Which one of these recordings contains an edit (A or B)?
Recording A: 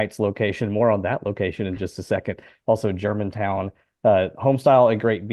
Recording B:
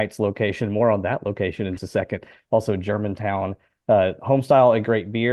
B